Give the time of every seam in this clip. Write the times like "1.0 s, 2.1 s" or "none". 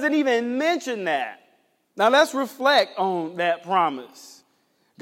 1.8 s